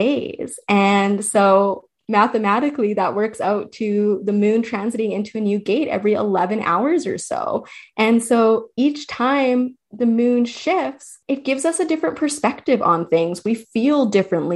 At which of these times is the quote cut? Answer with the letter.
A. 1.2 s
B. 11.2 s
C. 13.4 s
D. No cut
B